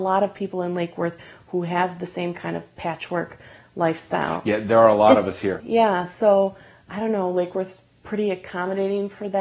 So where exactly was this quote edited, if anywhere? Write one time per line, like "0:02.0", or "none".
0:05.6